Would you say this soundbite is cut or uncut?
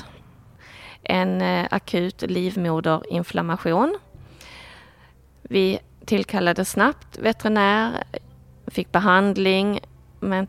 uncut